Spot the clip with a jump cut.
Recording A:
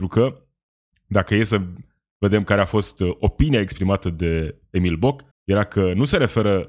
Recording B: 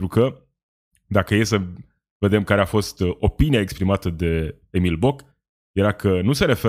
A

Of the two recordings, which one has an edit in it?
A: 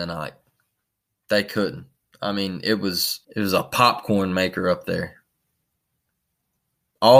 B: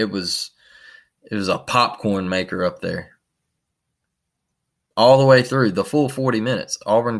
A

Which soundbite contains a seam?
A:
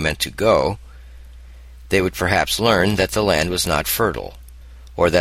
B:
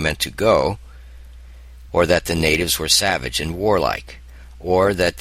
B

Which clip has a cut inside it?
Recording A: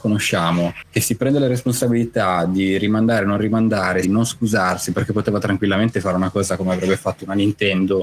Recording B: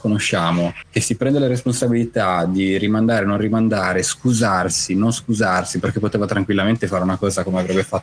A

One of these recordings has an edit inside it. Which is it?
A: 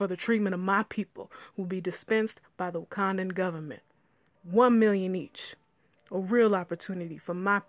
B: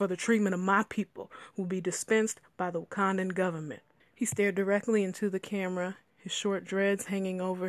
B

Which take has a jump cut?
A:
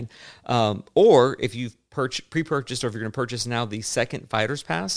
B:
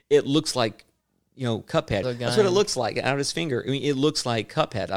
B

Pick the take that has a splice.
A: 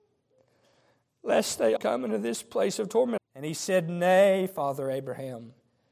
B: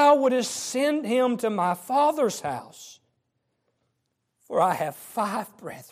A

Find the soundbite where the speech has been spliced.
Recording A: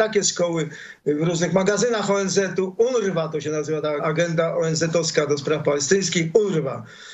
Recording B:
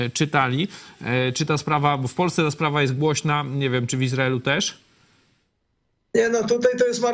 A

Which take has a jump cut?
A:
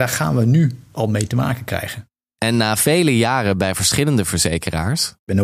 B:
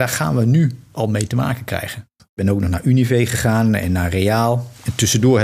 B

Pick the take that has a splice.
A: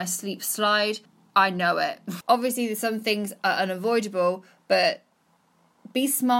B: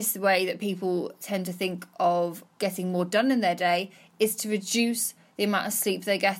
A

